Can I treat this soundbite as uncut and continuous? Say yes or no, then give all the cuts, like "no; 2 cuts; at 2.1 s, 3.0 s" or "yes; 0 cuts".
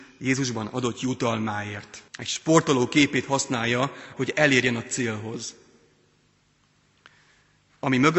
no; 2 cuts; at 2.1 s, 4.1 s